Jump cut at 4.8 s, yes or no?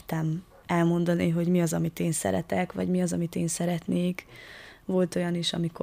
yes